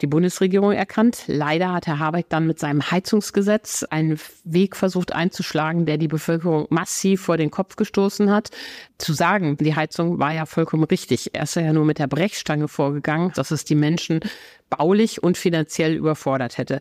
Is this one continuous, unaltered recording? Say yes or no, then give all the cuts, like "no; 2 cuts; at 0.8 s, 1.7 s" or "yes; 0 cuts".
no; 2 cuts; at 9.6 s, 13.3 s